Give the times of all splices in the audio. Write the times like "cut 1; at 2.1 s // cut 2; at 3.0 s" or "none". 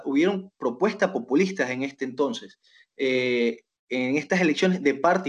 none